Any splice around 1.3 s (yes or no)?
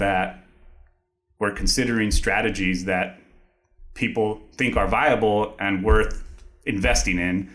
no